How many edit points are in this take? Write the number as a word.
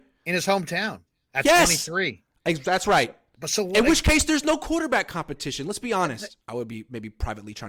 one